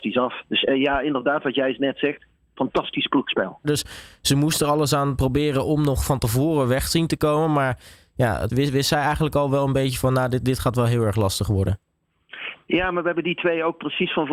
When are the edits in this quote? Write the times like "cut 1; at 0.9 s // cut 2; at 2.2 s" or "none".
cut 1; at 3.6 s // cut 2; at 8.5 s